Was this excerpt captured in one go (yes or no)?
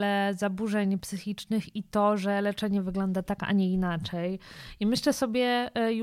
yes